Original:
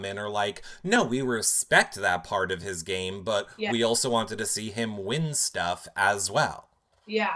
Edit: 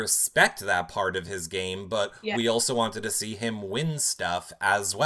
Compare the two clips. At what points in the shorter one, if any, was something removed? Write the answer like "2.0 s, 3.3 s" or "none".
none